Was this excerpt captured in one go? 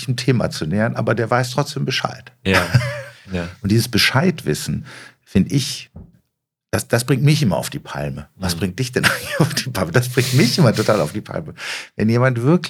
no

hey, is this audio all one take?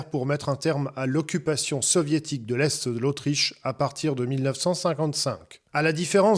yes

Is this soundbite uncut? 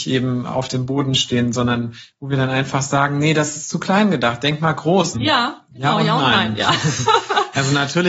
no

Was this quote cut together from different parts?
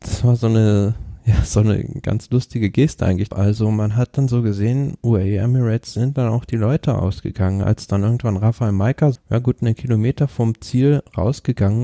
yes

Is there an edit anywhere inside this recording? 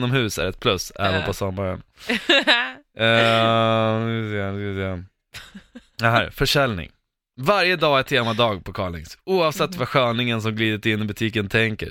no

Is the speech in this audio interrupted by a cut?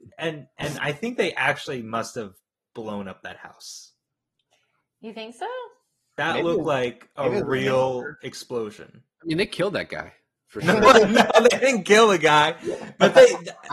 no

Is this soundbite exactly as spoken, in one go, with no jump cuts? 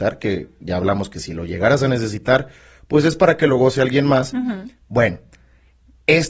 yes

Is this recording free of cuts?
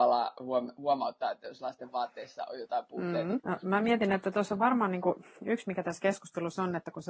no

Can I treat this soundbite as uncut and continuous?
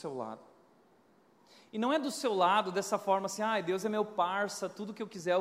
yes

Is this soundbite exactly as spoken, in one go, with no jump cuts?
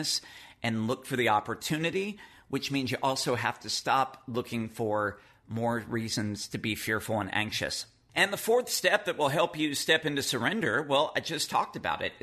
yes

